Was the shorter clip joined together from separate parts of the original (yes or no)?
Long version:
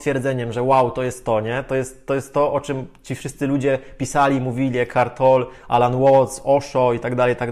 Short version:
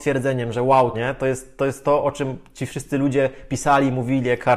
yes